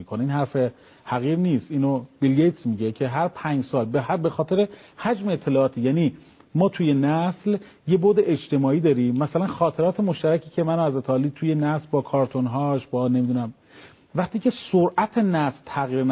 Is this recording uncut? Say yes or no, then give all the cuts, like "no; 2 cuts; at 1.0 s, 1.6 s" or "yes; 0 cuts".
yes; 0 cuts